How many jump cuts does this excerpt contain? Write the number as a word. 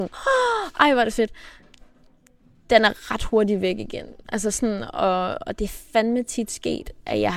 zero